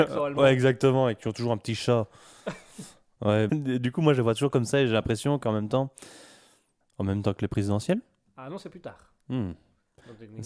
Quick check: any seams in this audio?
yes; 2 cuts; at 3.5 s, 6.8 s

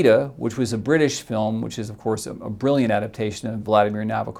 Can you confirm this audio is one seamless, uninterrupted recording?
yes; 0 cuts

